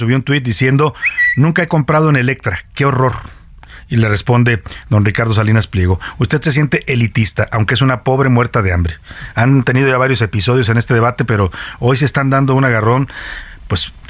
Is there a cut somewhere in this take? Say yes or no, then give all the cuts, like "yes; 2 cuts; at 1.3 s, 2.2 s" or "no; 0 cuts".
yes; 1 cut; at 9.3 s